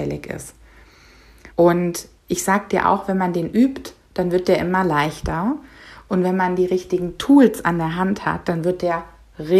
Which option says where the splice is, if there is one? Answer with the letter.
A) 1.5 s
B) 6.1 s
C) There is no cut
A